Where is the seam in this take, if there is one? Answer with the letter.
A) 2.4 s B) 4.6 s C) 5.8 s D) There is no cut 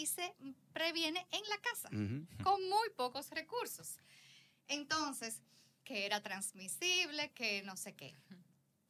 C